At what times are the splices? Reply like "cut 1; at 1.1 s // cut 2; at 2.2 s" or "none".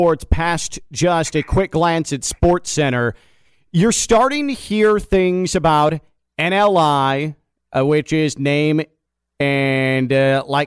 none